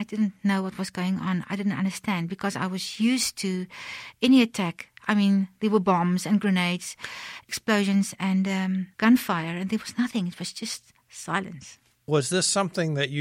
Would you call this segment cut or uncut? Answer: uncut